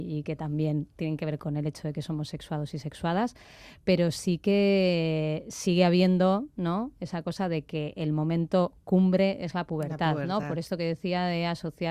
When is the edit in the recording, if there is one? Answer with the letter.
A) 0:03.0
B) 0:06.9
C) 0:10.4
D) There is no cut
D